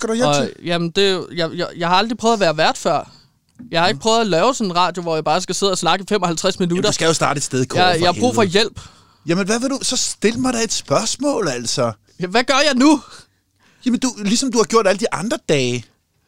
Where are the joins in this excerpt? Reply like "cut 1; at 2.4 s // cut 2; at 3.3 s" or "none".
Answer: none